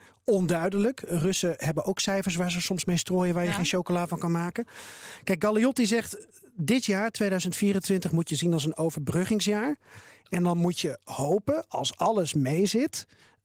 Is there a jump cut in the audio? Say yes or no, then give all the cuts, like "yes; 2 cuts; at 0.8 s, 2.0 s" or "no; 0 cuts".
no; 0 cuts